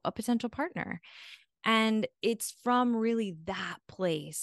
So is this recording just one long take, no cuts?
yes; 0 cuts

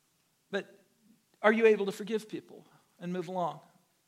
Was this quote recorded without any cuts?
yes; 0 cuts

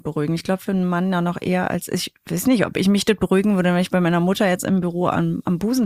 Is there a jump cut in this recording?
no; 0 cuts

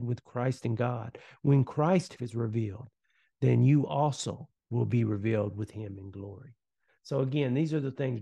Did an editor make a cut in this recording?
yes; 2 cuts; at 2.2 s, 4.6 s

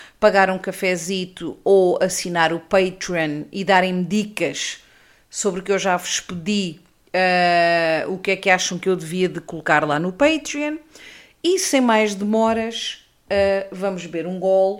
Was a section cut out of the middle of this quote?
no; 0 cuts

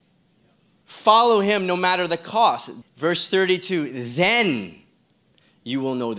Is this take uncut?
no; 1 cut; at 2.8 s

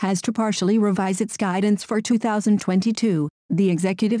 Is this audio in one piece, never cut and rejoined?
yes; 0 cuts

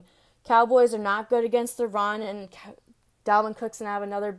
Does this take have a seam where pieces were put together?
no; 0 cuts

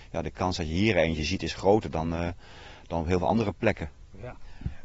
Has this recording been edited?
no; 0 cuts

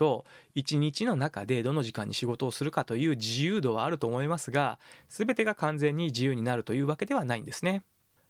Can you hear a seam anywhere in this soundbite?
no; 0 cuts

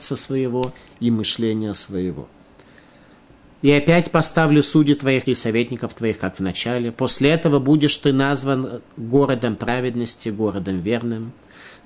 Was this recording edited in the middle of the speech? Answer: yes; 1 cut; at 5.3 s

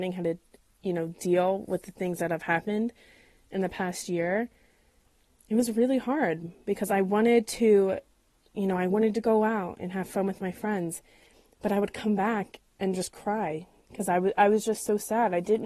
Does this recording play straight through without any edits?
yes; 0 cuts

